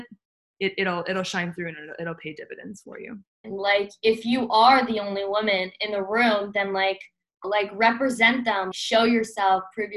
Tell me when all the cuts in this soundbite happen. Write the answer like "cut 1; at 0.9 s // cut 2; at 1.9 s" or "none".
cut 1; at 3.4 s // cut 2; at 7.4 s // cut 3; at 8.7 s